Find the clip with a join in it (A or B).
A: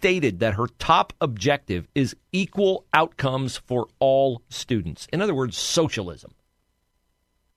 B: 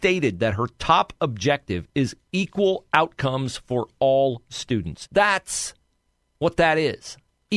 B